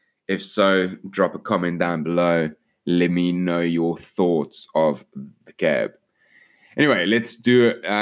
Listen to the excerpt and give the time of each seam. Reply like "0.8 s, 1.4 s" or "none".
none